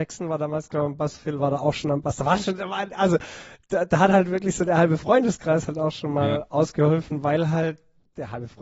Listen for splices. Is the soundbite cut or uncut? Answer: uncut